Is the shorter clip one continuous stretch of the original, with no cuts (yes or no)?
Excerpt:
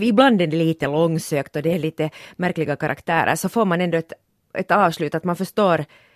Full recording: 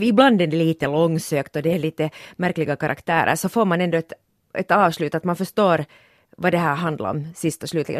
yes